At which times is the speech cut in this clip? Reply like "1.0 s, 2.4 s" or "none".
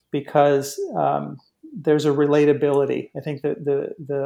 none